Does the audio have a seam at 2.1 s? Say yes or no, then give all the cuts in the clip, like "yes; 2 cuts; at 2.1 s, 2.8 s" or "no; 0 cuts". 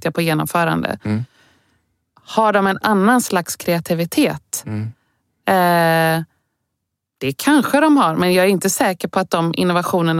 no; 0 cuts